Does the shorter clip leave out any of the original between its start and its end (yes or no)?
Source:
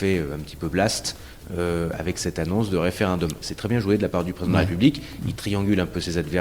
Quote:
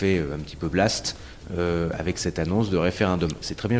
no